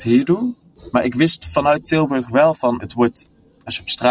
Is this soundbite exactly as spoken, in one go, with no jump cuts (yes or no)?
no